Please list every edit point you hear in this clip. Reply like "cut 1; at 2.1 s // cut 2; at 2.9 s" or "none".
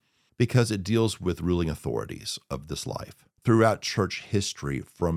cut 1; at 3.3 s